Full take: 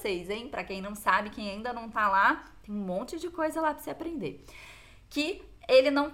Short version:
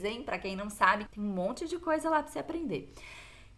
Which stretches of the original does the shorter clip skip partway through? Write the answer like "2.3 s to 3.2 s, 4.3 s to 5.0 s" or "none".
1.3 s to 2.6 s